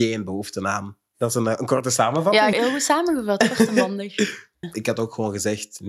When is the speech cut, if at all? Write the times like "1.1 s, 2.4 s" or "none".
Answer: 2.5 s, 4.6 s